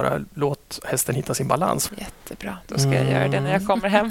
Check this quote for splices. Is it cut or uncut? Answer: cut